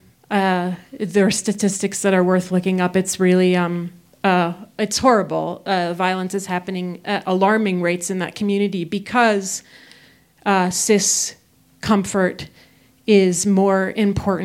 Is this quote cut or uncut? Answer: uncut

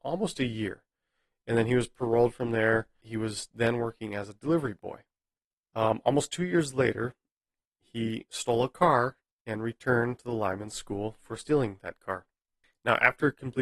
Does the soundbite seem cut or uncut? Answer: uncut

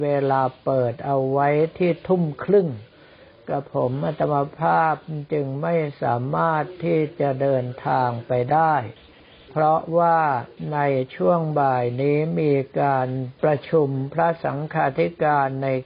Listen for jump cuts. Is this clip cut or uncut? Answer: uncut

